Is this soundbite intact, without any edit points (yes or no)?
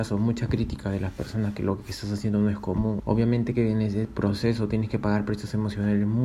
no